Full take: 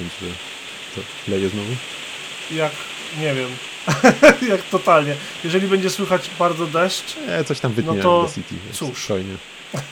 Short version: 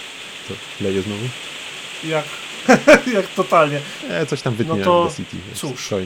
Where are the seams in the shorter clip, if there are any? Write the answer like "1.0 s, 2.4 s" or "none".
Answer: 2.7 s, 4.0 s